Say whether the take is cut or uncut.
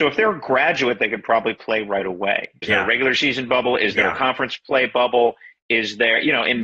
cut